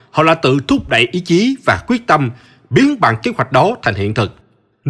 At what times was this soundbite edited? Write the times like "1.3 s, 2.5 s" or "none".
none